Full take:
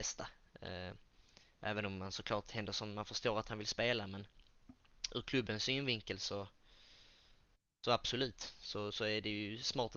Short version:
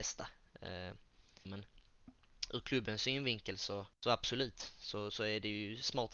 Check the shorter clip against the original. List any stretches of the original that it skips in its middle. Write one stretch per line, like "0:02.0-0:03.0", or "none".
0:01.5-0:04.1
0:06.5-0:07.7